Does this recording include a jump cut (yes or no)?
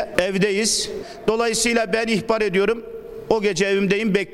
no